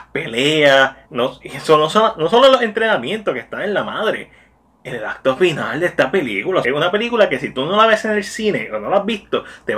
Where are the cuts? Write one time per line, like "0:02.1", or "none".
0:01.0
0:06.6

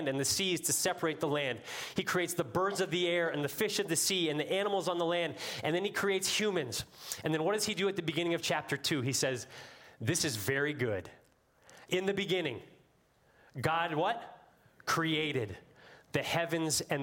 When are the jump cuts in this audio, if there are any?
0:11.9

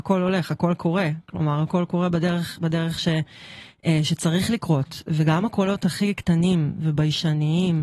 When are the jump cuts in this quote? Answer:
none

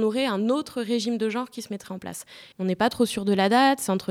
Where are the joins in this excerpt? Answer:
0:02.5

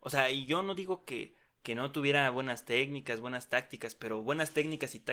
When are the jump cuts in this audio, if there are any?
none

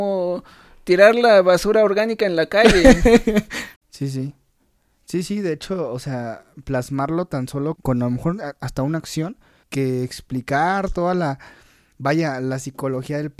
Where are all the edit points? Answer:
0:03.8
0:07.8
0:09.6

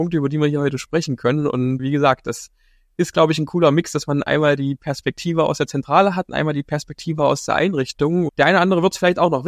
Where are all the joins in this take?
0:01.8
0:08.3

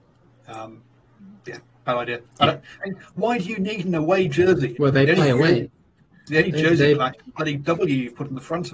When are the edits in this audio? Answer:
0:04.7

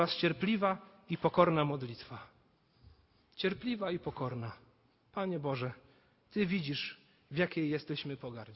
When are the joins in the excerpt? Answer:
none

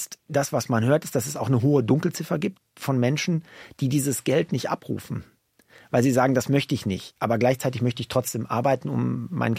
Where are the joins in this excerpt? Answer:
none

